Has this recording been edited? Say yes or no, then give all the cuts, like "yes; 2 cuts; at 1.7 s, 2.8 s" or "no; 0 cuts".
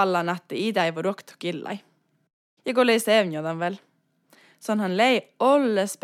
yes; 1 cut; at 2.6 s